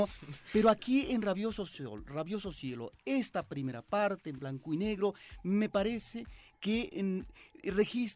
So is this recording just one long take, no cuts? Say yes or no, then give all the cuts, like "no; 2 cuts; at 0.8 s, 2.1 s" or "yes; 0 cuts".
yes; 0 cuts